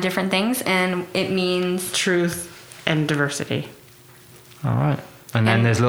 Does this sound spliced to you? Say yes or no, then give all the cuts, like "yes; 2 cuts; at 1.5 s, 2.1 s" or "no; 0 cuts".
no; 0 cuts